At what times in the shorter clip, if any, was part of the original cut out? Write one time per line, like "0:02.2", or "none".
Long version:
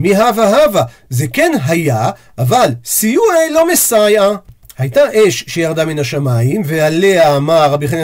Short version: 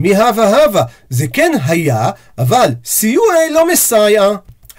none